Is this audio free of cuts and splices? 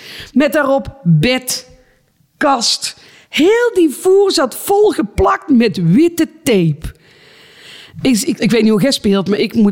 no; 1 cut; at 8.4 s

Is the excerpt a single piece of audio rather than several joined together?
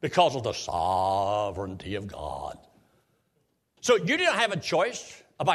no; 1 cut; at 3.8 s

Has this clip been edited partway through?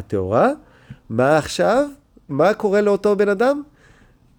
yes; 1 cut; at 2.3 s

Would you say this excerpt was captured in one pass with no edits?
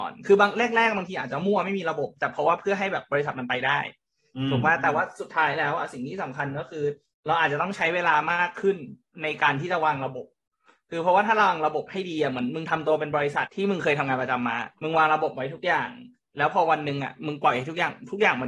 no; 2 cuts; at 13.5 s, 14.7 s

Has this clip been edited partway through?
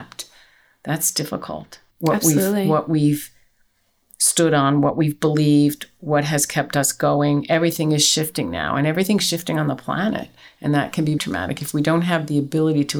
yes; 2 cuts; at 1.9 s, 11.2 s

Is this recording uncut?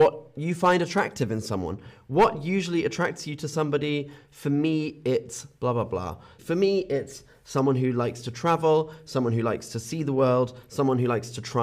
no; 1 cut; at 6.4 s

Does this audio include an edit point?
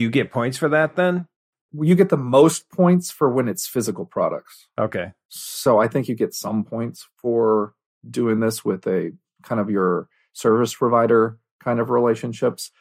no; 0 cuts

